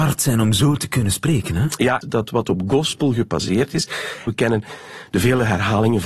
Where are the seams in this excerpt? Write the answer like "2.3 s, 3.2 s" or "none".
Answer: 2.0 s, 4.3 s